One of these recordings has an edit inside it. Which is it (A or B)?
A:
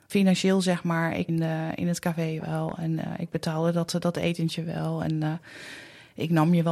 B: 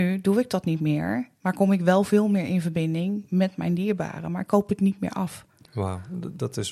A